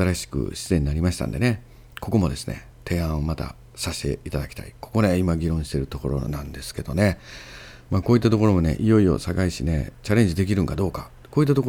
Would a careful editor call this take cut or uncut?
uncut